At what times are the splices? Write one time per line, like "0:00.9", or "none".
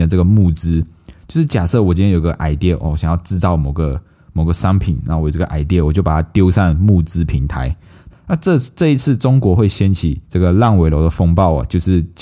0:08.1
0:10.2